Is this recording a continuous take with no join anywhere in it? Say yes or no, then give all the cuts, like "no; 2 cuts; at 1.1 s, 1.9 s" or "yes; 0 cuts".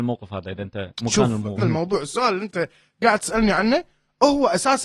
no; 1 cut; at 1.6 s